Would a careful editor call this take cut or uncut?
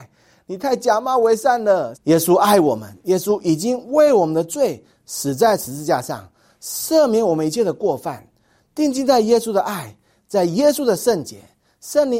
cut